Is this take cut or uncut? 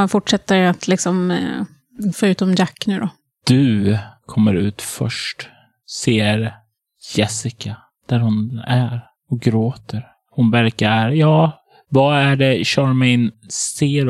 cut